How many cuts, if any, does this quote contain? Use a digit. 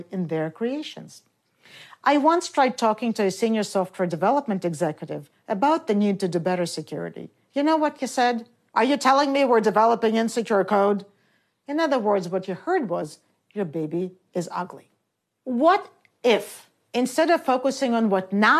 0